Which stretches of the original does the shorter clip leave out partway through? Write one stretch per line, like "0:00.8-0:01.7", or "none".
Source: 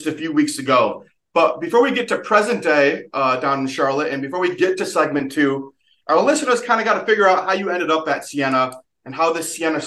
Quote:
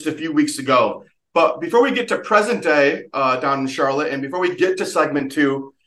none

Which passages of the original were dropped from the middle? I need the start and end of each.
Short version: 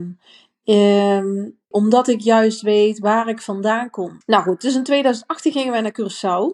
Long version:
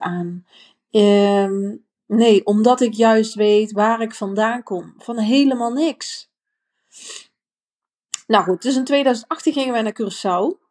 0:02.0-0:02.4
0:04.9-0:08.2

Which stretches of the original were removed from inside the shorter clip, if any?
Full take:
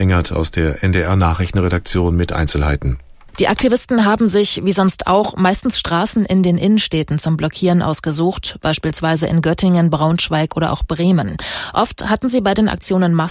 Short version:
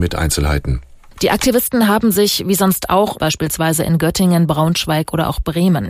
0:05.3-0:08.6

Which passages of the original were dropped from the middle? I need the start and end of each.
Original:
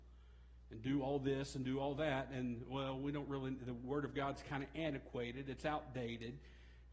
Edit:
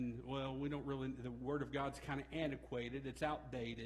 none

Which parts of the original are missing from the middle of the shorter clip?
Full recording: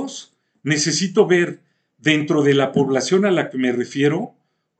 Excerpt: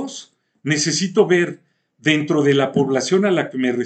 none

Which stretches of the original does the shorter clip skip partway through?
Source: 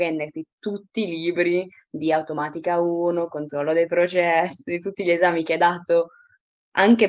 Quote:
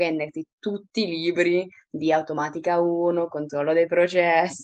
none

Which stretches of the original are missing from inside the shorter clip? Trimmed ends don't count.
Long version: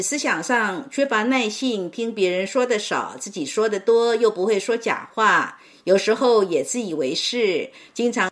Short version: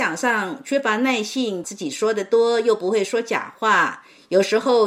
0:01.9-0:03.2

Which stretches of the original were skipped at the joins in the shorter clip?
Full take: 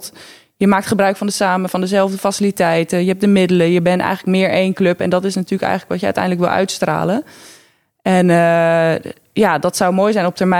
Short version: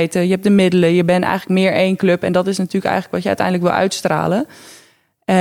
none

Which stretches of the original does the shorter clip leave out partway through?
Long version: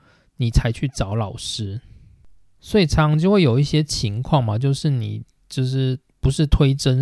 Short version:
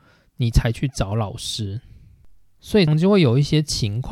0:02.9-0:03.1

